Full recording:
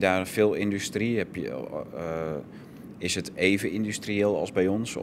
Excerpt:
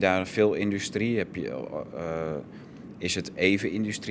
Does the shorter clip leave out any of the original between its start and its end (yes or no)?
no